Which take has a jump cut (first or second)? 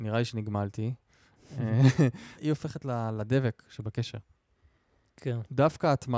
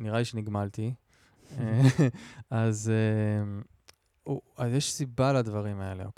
first